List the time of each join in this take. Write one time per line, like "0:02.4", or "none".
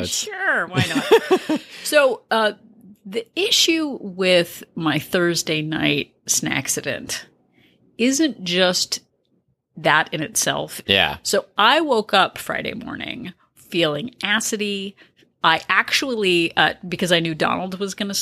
0:10.8